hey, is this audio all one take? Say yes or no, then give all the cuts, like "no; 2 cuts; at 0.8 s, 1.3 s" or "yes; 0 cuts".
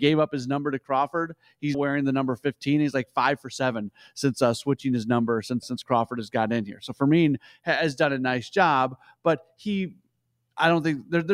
no; 2 cuts; at 1.7 s, 5.6 s